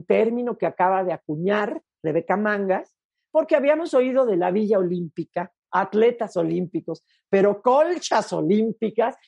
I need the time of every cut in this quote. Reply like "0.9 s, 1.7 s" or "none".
5.6 s